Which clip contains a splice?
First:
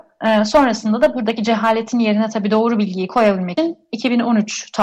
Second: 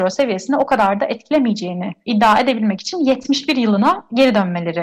first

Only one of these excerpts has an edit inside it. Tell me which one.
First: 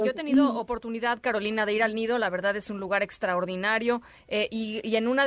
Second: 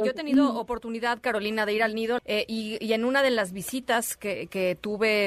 second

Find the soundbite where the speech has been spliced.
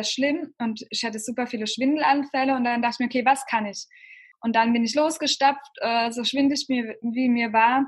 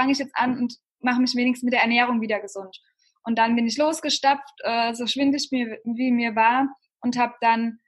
first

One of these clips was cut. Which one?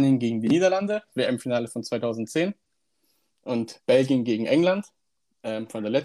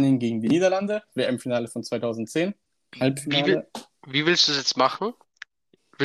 second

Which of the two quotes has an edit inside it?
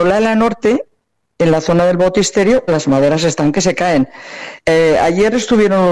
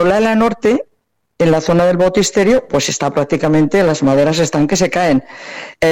first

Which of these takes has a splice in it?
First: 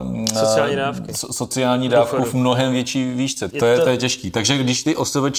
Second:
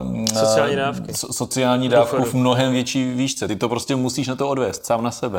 first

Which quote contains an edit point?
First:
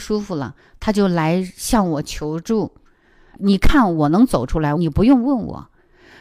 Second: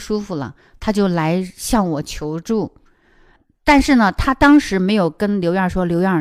first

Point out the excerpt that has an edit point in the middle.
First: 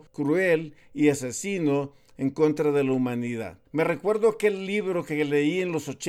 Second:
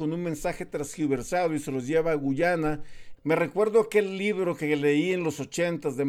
second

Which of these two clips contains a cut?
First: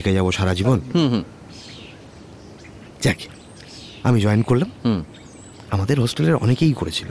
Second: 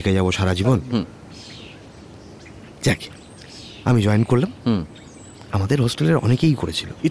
second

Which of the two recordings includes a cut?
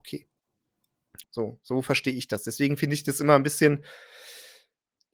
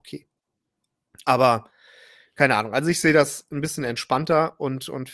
first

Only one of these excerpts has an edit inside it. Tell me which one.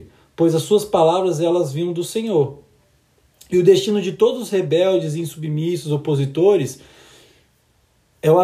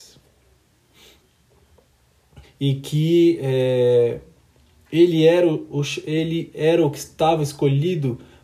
second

